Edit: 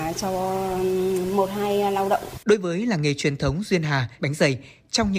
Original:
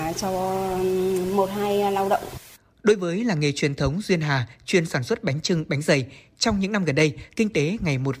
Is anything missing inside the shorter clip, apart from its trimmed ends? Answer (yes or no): yes